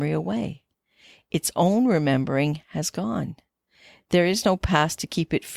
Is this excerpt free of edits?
yes; 0 cuts

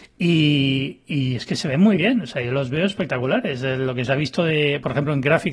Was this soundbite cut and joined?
no; 0 cuts

